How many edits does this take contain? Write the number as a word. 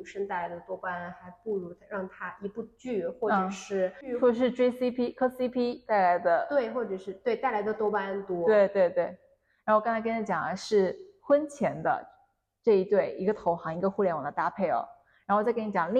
zero